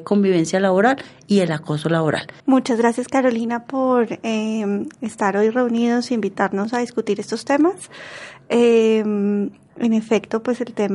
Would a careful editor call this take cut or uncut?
cut